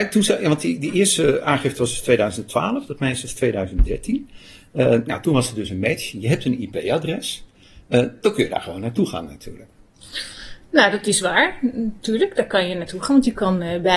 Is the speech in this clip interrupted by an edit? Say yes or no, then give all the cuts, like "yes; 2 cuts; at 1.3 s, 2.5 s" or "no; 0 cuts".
no; 0 cuts